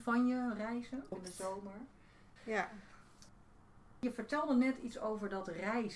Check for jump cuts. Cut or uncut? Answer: cut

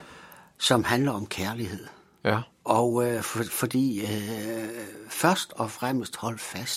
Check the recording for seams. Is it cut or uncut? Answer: cut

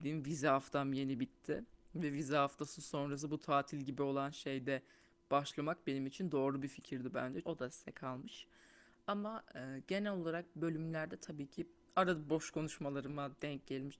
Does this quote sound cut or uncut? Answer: cut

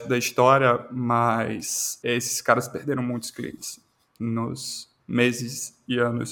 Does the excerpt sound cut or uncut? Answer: cut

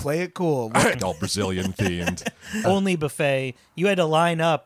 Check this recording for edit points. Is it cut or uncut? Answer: cut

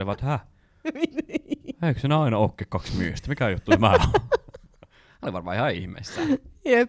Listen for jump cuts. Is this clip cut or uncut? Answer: uncut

